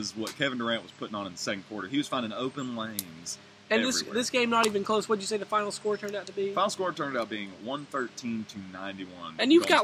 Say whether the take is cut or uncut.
uncut